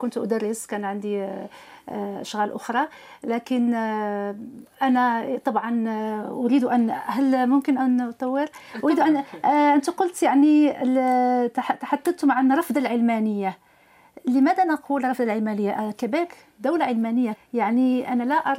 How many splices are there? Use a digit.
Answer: 1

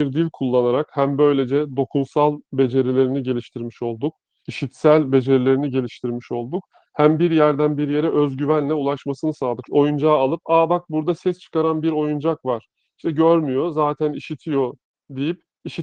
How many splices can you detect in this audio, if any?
2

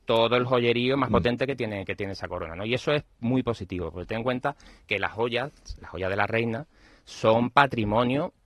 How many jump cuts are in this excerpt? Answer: 0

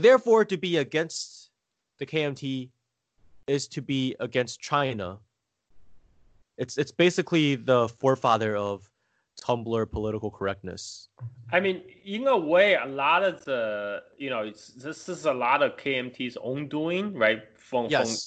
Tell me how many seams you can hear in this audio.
1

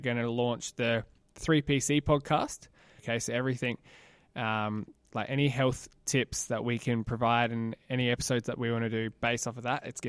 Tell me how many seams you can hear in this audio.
1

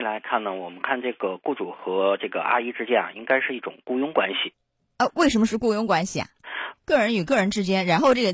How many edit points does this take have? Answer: 1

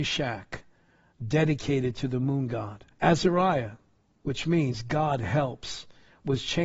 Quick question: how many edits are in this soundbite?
1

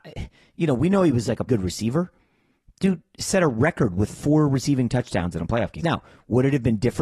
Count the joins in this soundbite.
2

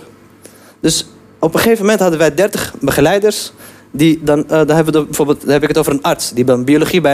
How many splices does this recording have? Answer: 0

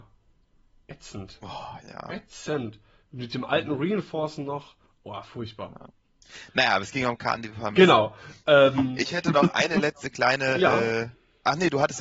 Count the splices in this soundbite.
0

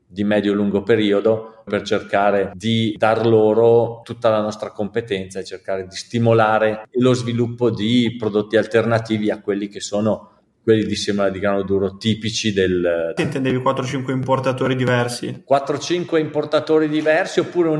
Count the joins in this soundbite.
3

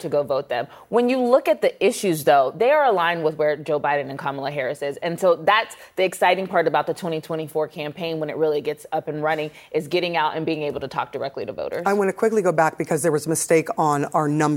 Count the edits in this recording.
0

